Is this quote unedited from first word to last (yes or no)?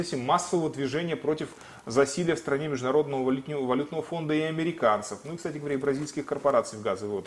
yes